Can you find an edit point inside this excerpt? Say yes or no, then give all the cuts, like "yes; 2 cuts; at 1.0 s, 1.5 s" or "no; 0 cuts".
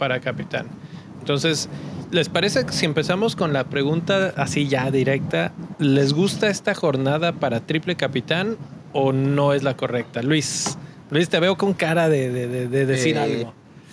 no; 0 cuts